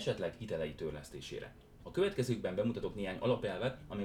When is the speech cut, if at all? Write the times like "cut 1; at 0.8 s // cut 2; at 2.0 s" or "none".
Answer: cut 1; at 1.8 s